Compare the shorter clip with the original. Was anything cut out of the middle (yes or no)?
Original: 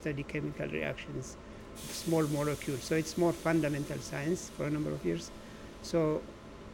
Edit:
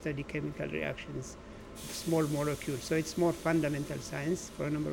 no